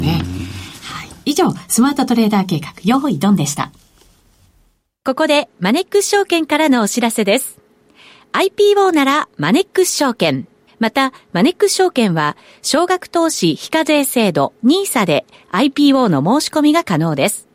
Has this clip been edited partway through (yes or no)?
yes